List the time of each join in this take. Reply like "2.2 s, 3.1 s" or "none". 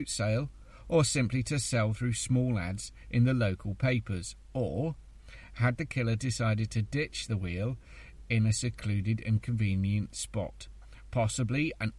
none